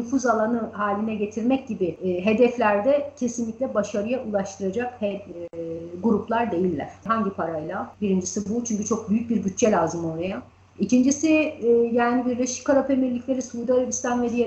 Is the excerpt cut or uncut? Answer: cut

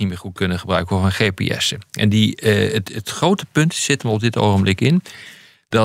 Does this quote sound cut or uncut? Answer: uncut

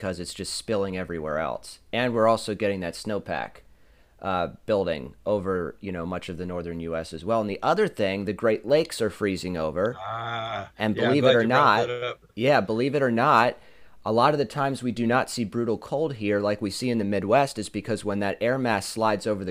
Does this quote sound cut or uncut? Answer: uncut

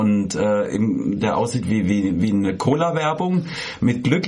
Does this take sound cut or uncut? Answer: cut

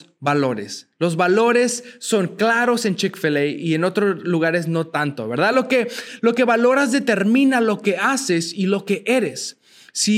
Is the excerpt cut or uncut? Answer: uncut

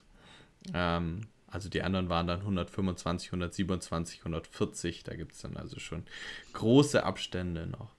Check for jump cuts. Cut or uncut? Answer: uncut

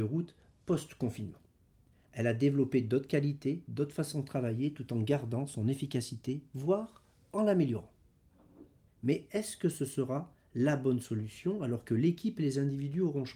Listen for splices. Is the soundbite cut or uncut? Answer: cut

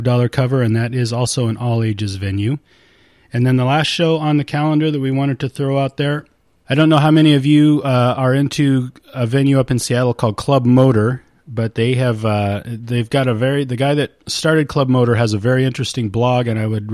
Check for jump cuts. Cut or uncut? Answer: uncut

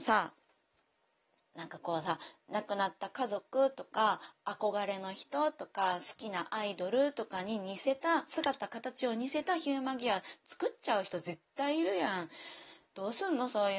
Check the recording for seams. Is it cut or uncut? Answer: uncut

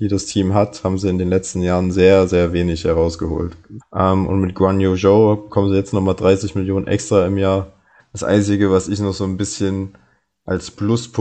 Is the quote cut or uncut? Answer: cut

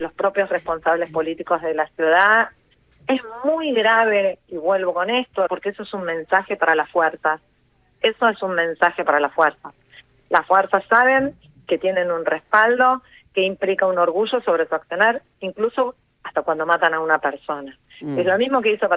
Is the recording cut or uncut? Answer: cut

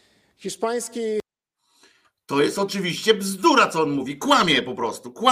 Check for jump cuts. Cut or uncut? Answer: uncut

